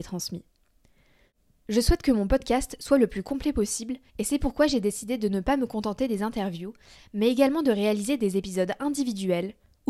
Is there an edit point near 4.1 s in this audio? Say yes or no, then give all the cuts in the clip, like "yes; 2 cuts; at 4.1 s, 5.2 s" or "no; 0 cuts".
yes; 1 cut; at 4.1 s